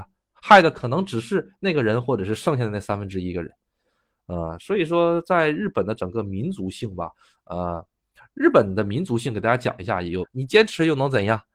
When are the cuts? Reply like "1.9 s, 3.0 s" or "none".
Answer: 10.2 s